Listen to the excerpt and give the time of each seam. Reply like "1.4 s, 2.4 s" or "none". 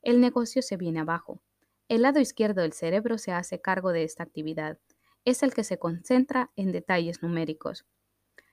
none